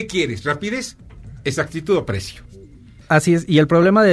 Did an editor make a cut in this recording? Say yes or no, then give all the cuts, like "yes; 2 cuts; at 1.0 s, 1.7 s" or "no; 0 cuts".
yes; 1 cut; at 3.0 s